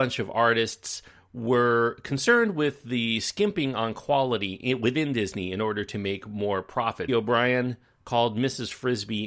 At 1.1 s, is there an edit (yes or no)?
no